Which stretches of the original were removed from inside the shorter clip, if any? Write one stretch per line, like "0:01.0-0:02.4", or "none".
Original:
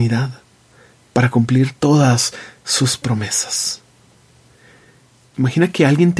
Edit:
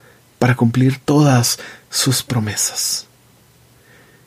none